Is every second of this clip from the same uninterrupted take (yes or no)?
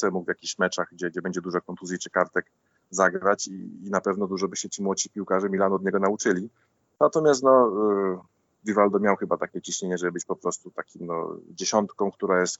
yes